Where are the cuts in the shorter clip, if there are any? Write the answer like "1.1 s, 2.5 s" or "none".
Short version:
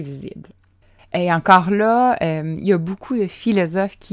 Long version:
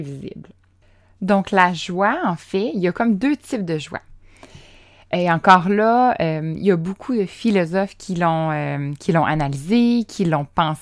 1.0 s